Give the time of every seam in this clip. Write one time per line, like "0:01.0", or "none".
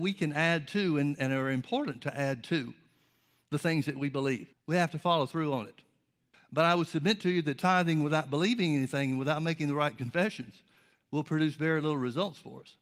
0:04.5
0:06.3